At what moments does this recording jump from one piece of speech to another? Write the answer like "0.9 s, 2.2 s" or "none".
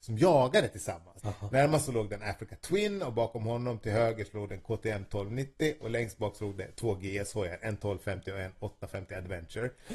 1.2 s